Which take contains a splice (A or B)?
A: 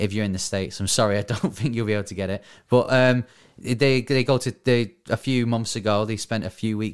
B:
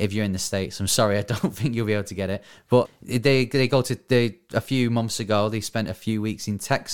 B